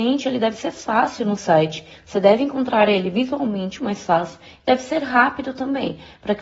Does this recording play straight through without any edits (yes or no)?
no